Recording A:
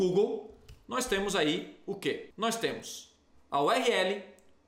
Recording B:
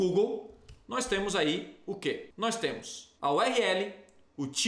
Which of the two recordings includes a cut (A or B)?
B